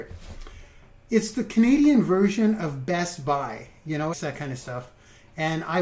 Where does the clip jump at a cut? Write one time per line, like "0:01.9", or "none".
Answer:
0:04.1